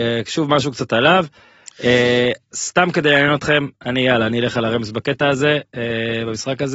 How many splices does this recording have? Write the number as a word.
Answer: zero